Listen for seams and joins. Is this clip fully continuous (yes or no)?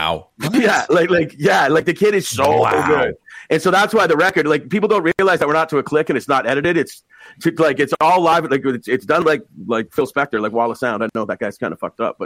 yes